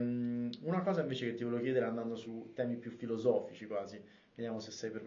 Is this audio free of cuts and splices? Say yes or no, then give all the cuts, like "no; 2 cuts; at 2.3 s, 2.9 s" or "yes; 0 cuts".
yes; 0 cuts